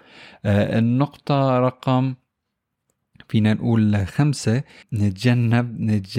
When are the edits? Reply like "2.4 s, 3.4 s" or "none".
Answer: 4.8 s